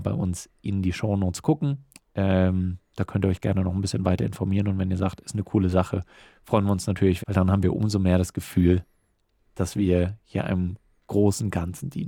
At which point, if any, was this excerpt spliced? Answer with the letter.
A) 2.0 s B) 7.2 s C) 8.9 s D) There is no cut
B